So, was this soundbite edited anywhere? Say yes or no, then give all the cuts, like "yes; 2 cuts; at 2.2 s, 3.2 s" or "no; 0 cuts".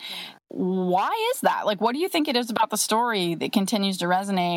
no; 0 cuts